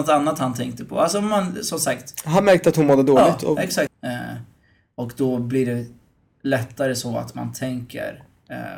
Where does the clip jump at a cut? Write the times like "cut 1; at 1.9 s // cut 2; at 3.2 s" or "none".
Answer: cut 1; at 3.9 s